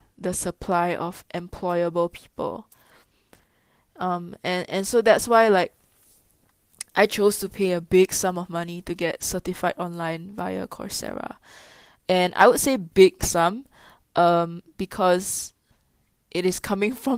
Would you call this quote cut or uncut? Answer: uncut